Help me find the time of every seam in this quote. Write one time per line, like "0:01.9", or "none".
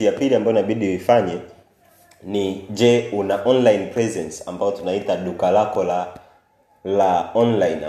none